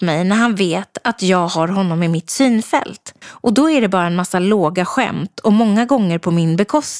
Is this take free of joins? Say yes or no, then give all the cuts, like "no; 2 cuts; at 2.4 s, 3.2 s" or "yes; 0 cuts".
no; 1 cut; at 3.2 s